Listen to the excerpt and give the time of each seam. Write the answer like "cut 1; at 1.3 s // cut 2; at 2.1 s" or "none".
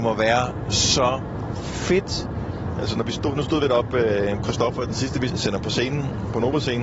cut 1; at 5.3 s